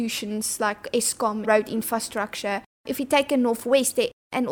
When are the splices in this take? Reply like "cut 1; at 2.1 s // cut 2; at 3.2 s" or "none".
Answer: cut 1; at 1.4 s